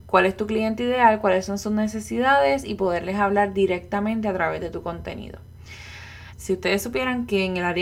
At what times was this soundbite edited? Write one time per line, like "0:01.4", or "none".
0:06.3